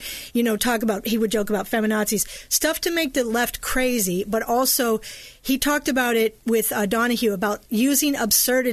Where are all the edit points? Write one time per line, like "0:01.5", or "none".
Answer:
none